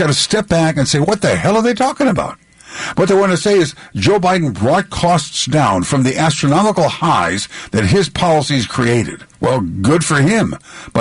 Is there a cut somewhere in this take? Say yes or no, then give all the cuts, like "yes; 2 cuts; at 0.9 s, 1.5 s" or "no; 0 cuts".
yes; 1 cut; at 9.3 s